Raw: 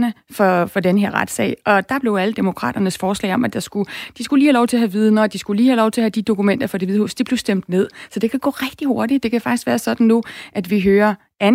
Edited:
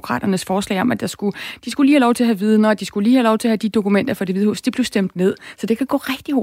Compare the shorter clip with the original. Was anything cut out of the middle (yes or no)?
no